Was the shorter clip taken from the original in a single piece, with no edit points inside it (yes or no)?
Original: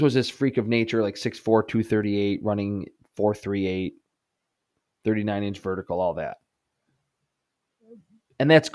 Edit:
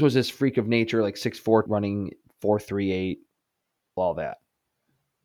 no